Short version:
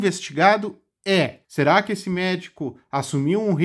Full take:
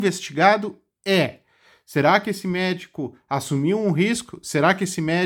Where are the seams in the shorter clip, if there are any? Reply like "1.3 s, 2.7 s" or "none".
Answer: 1.4 s

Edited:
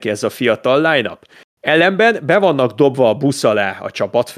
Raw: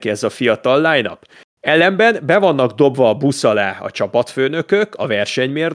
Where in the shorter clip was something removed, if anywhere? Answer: none

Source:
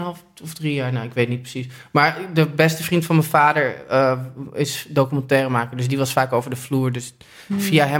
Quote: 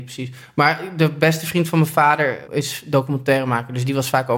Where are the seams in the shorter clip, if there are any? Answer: 2.5 s

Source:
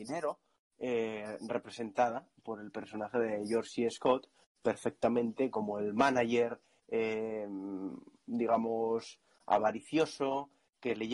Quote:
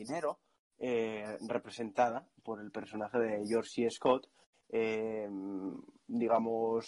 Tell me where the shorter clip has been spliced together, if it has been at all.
4.5 s

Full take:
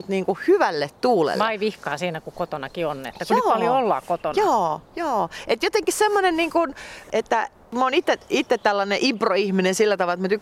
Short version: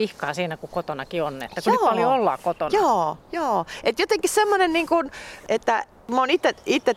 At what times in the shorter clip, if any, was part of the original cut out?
none

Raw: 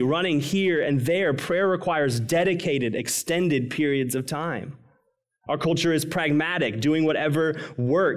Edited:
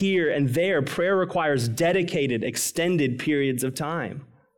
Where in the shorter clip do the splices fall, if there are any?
none

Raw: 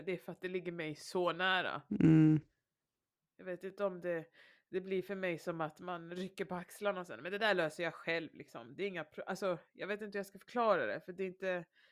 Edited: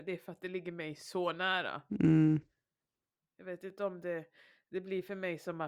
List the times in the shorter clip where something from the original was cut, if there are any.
none

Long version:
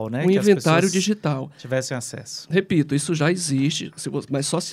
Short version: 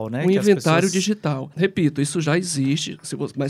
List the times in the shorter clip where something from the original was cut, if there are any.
1.5 s

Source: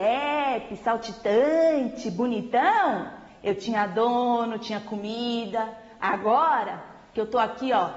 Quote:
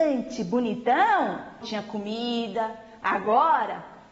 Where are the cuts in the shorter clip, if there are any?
1.6 s

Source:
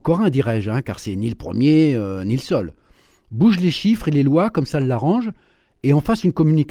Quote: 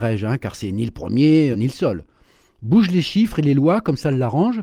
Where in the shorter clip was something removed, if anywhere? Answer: 1.5 s

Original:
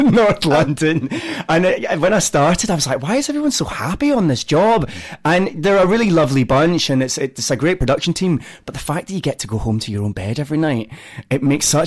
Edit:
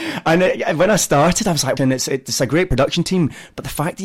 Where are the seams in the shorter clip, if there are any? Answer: 1.8 s

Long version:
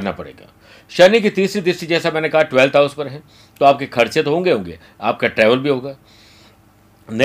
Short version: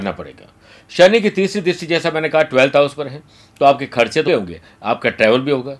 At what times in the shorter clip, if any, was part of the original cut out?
4.3 s

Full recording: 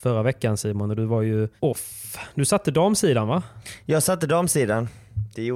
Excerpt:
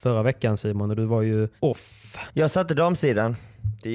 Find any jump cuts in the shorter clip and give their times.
2.3 s

